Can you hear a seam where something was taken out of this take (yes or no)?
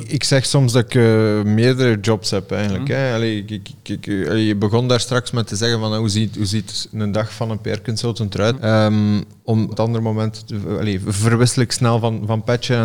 yes